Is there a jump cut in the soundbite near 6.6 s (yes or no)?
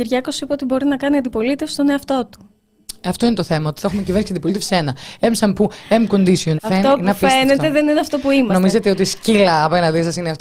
yes